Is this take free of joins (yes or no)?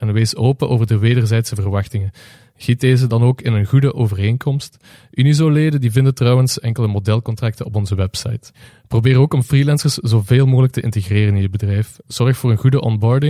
yes